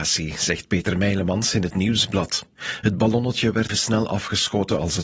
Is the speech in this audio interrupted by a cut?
yes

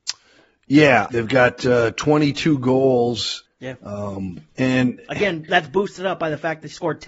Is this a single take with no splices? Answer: no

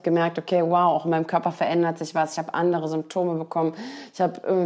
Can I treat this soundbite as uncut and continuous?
yes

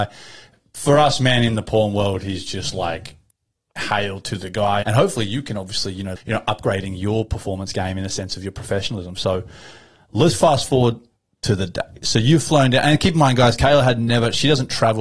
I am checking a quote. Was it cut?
yes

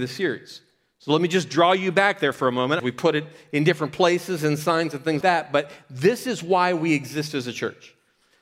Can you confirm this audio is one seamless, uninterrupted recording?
no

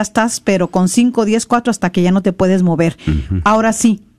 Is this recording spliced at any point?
no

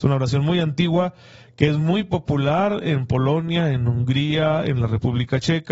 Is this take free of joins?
yes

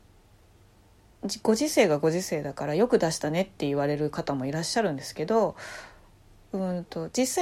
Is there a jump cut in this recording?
no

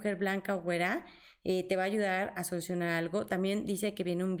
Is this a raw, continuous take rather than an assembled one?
yes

